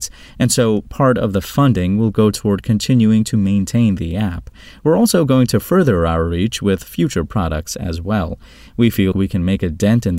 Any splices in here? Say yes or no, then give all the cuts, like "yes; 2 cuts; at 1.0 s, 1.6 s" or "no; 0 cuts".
yes; 1 cut; at 9.1 s